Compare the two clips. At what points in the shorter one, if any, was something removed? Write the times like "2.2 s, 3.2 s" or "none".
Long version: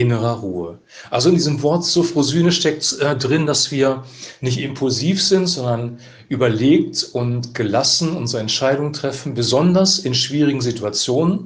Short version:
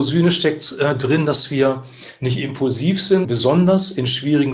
3.2 s

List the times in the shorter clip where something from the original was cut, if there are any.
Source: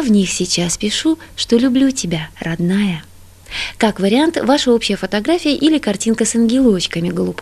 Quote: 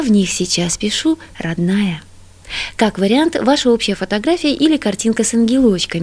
1.3 s

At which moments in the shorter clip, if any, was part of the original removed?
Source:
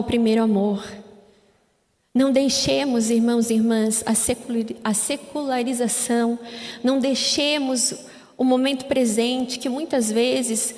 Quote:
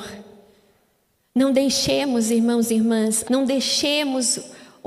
3.2 s

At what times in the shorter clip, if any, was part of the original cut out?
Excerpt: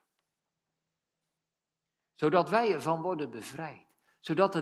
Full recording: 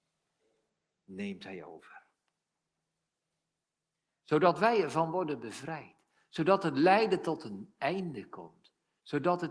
none

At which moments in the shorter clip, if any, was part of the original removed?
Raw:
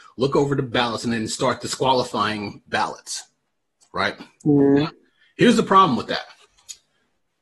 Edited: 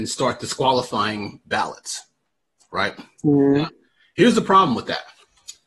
none

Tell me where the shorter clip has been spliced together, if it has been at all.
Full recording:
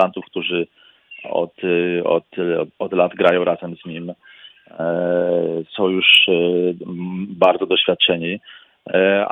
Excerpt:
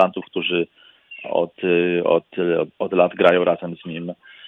none

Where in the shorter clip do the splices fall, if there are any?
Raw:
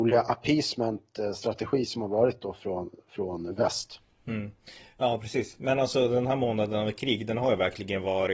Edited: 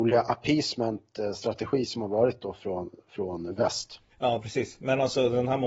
4.1 s

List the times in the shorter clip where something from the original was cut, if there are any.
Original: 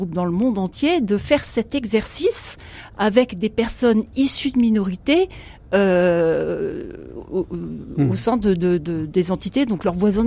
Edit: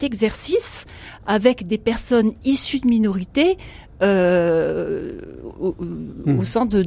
none

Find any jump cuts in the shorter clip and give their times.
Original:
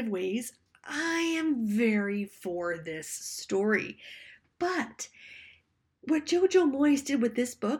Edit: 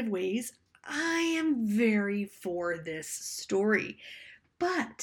none

